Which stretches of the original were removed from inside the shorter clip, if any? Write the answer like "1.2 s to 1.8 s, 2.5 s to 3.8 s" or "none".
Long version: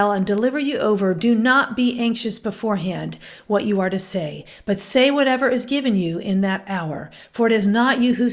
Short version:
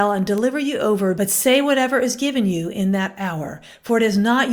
1.1 s to 4.6 s